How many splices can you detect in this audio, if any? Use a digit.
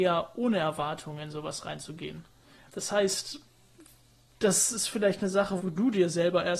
2